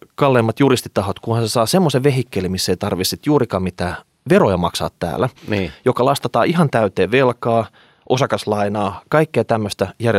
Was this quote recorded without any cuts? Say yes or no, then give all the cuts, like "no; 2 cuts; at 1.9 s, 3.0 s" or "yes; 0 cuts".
yes; 0 cuts